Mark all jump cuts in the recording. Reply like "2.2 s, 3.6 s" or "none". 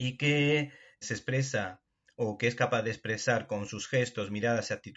1.0 s